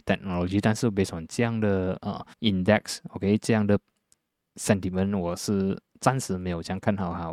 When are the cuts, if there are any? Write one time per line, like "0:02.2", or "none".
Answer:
0:02.3